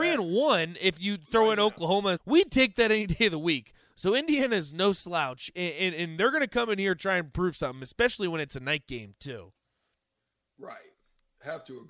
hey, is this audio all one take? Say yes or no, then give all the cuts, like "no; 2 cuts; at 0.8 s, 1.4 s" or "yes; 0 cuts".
no; 1 cut; at 2.2 s